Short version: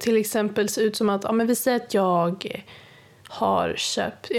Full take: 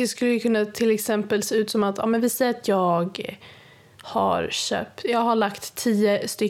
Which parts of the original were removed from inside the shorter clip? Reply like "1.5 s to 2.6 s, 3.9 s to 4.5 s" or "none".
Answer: none